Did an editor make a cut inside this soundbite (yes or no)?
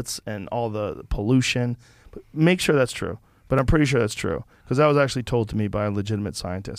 no